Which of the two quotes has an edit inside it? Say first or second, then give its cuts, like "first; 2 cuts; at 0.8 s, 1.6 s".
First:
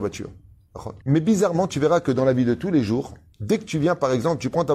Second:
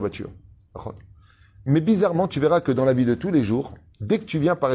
first; 1 cut; at 1.0 s